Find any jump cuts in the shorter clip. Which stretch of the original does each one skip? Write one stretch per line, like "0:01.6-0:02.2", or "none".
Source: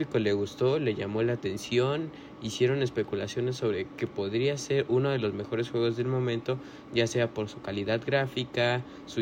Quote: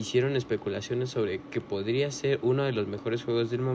none